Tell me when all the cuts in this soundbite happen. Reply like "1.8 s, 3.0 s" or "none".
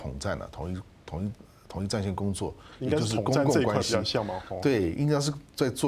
none